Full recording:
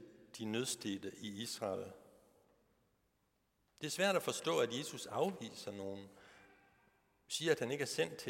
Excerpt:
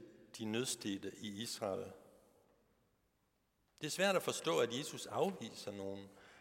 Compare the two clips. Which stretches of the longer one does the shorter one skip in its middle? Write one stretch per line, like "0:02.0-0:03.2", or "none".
none